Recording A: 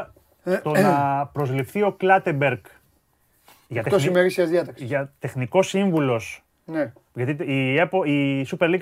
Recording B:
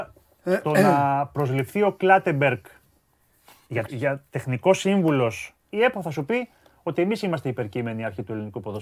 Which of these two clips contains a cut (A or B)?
B